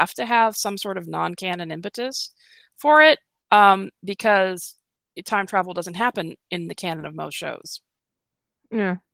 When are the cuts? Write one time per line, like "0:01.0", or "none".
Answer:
none